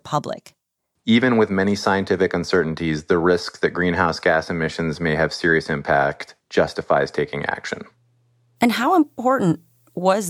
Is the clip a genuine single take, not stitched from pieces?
no; 1 cut; at 1.0 s

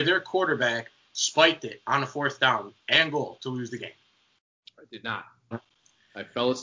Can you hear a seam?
yes; 1 cut; at 5.5 s

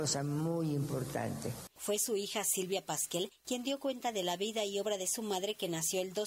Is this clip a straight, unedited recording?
no; 1 cut; at 1.7 s

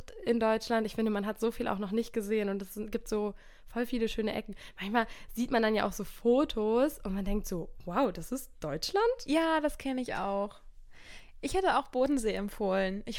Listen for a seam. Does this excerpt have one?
no; 0 cuts

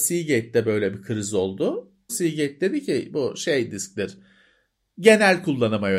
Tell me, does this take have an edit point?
yes; 1 cut; at 2.1 s

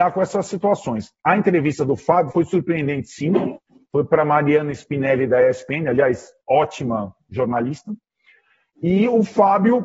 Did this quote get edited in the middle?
no; 0 cuts

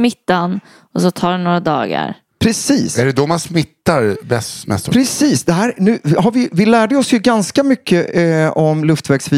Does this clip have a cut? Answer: no; 0 cuts

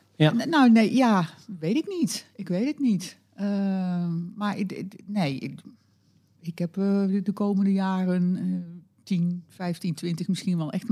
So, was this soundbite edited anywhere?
no; 0 cuts

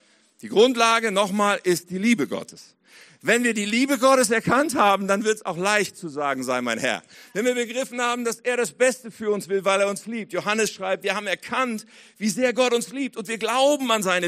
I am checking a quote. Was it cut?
no; 0 cuts

